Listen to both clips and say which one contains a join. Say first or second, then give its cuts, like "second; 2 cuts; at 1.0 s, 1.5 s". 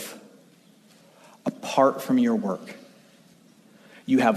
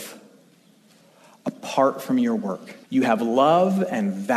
second; 1 cut; at 2.8 s